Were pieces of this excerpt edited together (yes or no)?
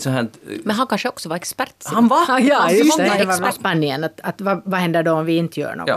yes